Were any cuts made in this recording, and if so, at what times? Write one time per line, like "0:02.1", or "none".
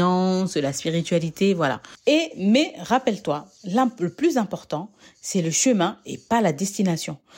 0:02.0